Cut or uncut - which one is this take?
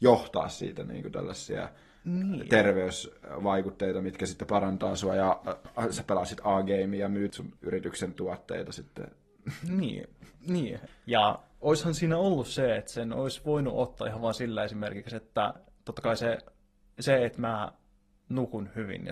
cut